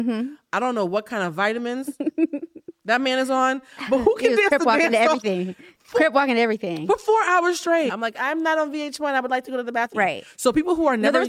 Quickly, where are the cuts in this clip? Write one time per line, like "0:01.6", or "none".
0:07.9
0:09.9